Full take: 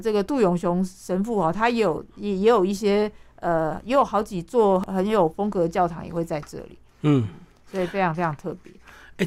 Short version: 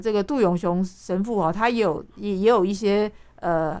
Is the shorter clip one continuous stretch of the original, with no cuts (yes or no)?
yes